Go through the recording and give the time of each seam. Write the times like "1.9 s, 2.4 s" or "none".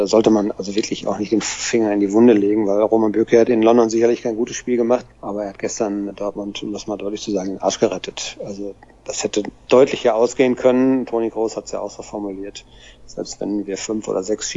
5.1 s